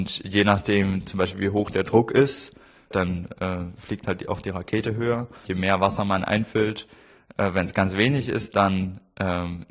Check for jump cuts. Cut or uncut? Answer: cut